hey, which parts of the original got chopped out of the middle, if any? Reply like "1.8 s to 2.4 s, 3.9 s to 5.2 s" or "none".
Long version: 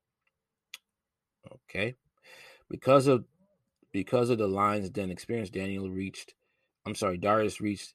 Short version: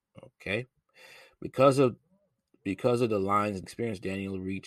4.9 s to 5.1 s